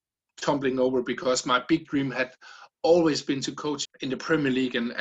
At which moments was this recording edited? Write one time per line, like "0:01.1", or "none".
0:03.8